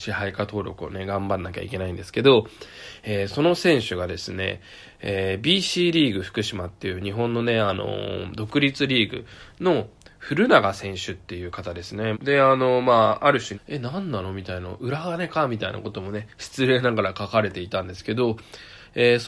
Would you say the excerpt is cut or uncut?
cut